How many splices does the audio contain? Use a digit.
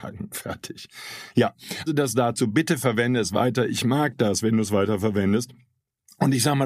1